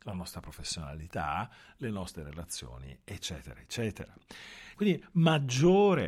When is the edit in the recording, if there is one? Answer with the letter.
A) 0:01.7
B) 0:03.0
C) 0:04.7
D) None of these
C